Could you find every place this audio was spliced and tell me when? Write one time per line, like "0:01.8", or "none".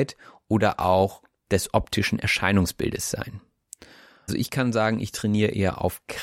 0:04.3